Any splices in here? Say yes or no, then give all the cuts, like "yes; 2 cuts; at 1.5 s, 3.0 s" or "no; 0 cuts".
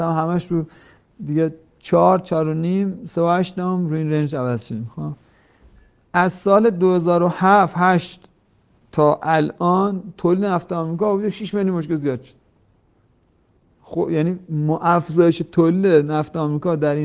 no; 0 cuts